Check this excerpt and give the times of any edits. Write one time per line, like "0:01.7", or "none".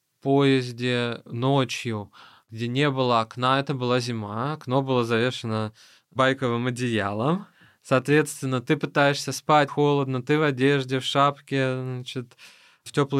0:09.7